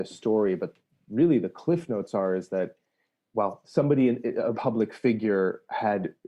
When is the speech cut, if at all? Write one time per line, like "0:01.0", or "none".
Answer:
0:03.2
0:04.5

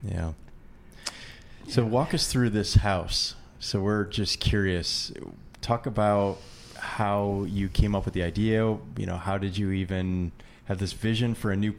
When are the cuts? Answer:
none

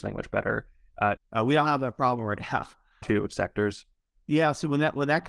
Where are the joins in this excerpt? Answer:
0:01.2
0:03.0

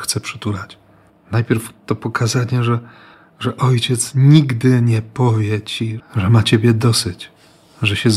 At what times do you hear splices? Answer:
0:01.1
0:06.0

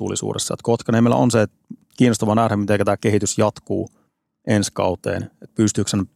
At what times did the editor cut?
none

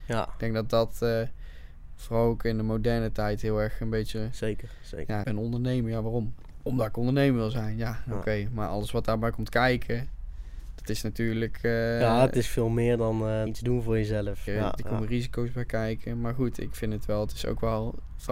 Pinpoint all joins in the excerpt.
0:05.2
0:13.5
0:14.5

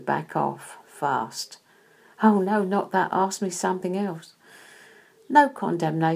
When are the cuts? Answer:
none

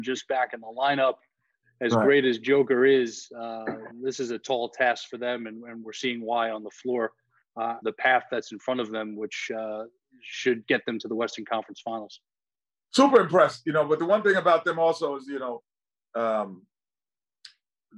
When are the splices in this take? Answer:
0:07.8

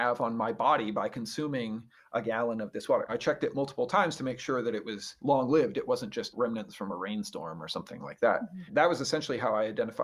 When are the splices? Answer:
0:03.1

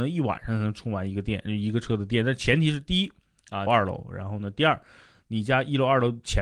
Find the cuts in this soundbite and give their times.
0:03.7

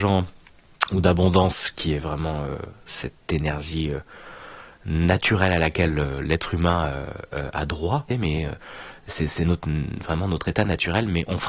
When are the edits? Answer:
0:08.1

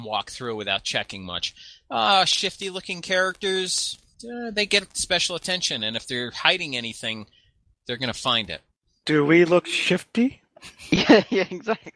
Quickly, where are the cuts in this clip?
0:09.0

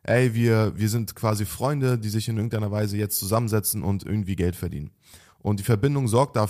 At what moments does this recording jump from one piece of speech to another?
0:05.3

